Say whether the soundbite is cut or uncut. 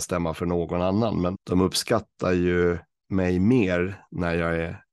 cut